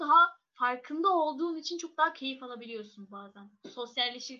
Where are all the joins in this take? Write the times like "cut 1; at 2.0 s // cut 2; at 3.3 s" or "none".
none